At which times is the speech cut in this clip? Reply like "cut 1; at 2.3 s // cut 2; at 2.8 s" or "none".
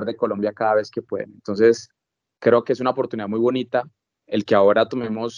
none